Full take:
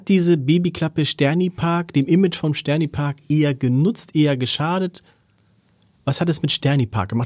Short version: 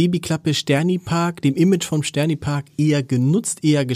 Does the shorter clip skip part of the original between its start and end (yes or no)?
no